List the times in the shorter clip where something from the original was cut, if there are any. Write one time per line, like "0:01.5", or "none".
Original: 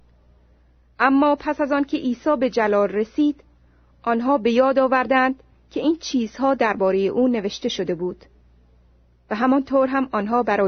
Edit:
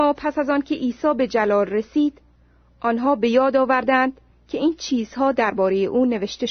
none